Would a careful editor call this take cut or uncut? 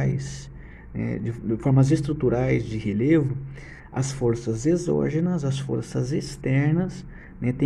uncut